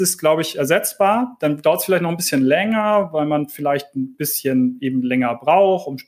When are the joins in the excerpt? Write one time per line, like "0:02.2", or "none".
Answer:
none

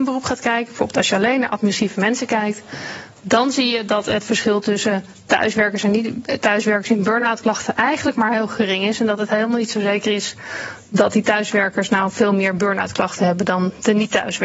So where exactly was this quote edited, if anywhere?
none

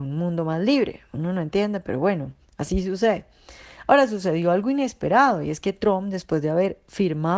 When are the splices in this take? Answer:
none

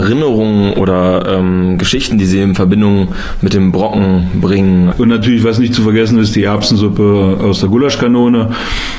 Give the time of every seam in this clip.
0:04.9

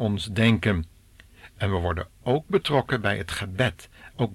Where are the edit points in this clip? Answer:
none

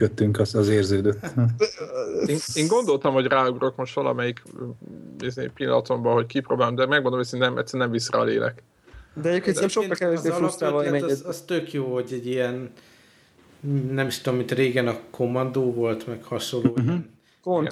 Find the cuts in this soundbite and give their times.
none

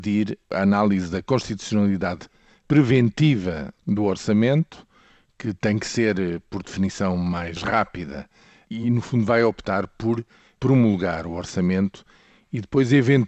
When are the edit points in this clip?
none

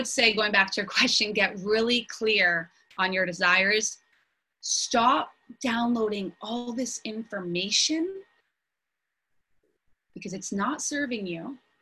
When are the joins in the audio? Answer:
none

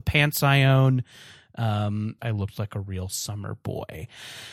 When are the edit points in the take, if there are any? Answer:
0:02.2

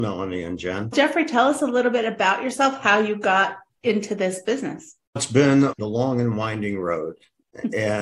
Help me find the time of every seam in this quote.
0:05.8

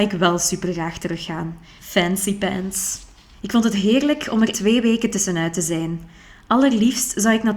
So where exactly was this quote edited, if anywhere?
0:01.8
0:03.3
0:04.5

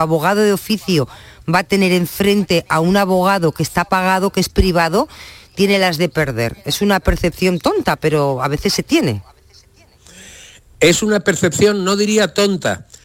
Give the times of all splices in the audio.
none

